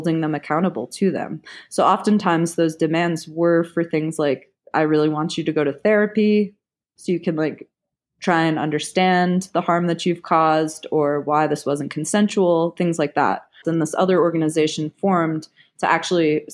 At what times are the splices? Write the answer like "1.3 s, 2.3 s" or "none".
13.6 s